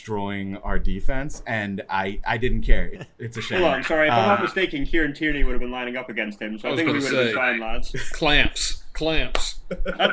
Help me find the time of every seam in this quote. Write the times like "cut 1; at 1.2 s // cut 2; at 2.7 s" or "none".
cut 1; at 2.9 s